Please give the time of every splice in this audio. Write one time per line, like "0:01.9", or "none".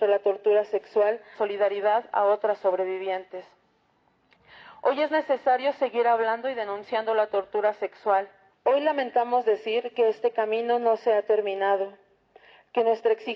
0:01.3
0:08.5